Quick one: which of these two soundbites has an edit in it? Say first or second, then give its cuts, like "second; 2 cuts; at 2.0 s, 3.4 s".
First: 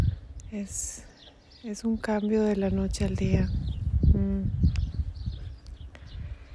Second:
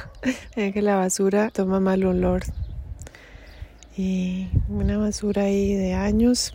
second; 1 cut; at 1.5 s